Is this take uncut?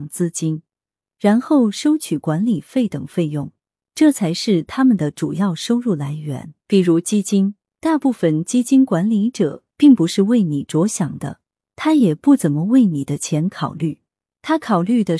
no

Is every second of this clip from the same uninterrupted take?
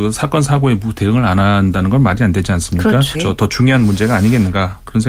no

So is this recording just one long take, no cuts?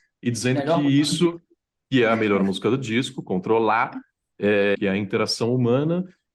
no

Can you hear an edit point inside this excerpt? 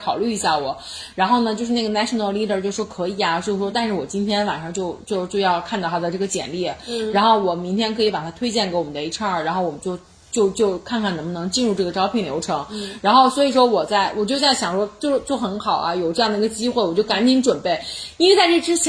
no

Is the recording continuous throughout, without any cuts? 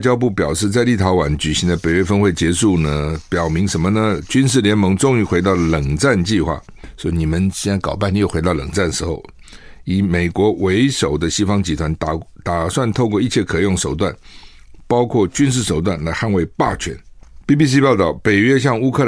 yes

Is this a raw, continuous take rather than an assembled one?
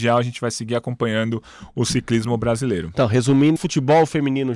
no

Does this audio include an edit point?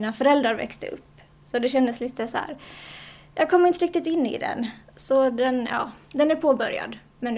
no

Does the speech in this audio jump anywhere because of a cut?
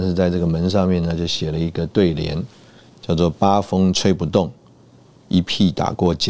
no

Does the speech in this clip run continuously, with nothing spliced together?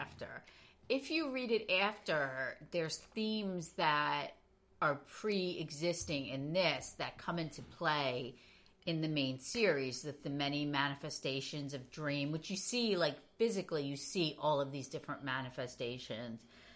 no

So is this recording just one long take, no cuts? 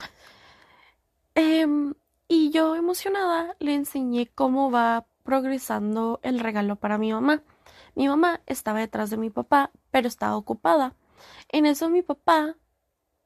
yes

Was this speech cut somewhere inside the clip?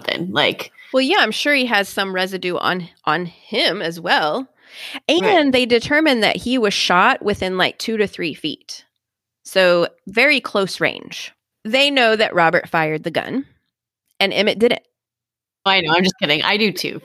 yes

